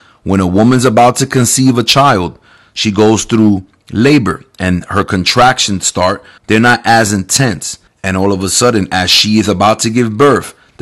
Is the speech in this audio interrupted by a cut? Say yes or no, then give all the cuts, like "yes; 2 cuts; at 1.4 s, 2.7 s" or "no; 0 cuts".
yes; 2 cuts; at 6.4 s, 7.9 s